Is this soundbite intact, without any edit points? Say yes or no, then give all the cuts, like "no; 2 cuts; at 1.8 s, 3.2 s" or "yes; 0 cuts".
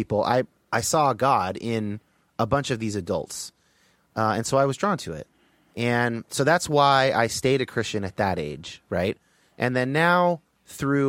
yes; 0 cuts